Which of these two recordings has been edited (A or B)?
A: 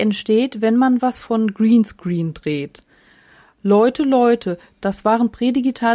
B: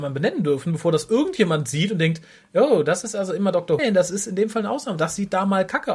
B